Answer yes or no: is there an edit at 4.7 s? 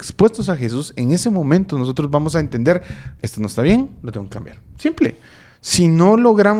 no